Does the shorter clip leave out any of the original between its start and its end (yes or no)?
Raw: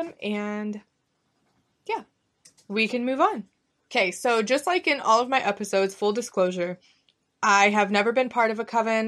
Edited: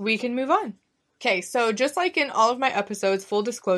no